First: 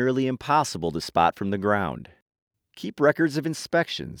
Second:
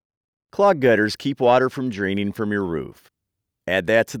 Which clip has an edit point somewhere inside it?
first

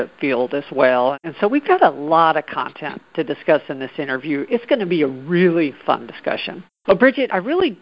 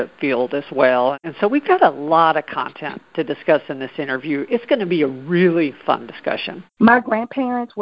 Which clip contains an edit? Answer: second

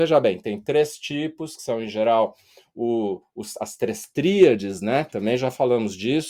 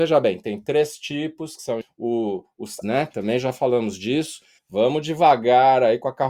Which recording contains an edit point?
second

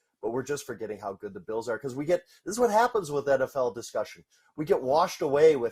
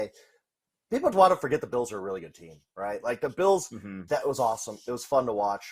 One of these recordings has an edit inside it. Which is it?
second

